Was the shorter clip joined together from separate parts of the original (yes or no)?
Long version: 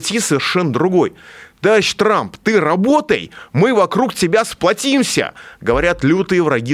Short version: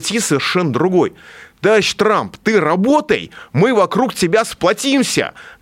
no